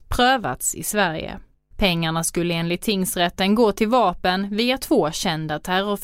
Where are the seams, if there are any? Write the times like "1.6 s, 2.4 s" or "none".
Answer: 1.7 s